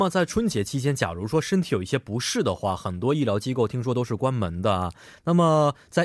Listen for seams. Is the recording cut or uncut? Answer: uncut